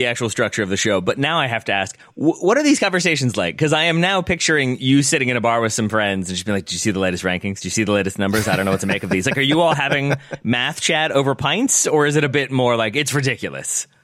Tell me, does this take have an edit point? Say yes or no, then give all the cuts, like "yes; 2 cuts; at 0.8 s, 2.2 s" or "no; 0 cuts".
no; 0 cuts